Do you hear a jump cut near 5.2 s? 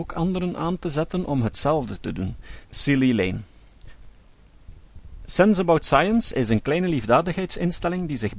no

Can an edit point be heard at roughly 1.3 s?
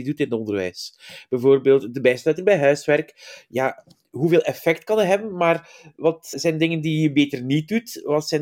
no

